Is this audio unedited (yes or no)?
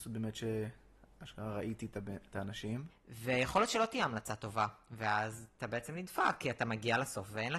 no